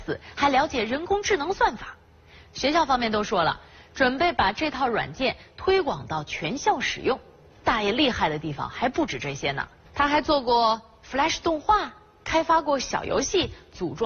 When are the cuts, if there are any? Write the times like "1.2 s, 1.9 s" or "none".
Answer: none